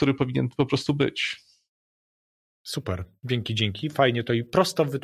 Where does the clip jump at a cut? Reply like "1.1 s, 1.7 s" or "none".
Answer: none